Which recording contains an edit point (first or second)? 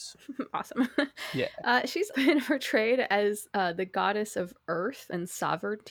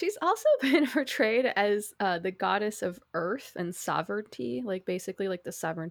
first